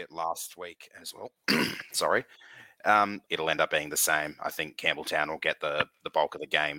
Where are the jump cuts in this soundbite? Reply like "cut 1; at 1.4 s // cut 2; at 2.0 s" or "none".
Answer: cut 1; at 3.3 s